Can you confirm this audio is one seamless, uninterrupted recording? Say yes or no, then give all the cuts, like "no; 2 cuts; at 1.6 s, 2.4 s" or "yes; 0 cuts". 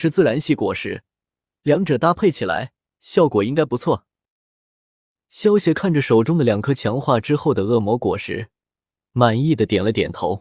yes; 0 cuts